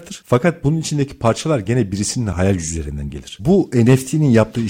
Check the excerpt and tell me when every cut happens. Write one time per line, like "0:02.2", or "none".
0:03.4